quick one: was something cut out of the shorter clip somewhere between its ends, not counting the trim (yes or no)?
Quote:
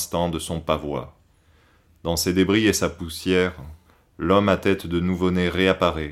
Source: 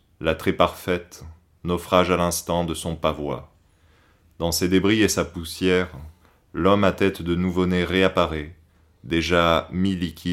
no